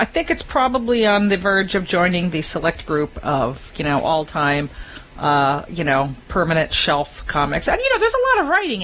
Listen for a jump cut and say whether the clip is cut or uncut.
uncut